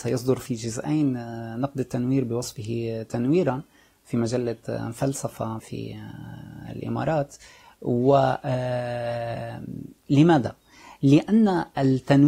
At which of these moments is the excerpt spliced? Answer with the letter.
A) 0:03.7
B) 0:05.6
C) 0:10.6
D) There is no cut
B